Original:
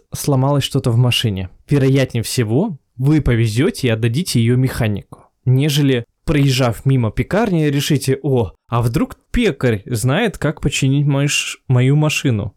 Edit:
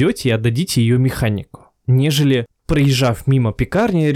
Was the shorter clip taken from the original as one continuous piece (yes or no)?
yes